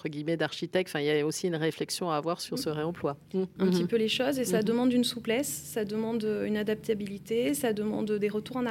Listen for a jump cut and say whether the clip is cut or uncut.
cut